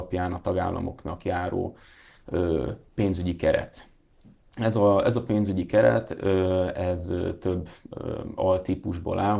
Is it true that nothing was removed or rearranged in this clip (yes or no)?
yes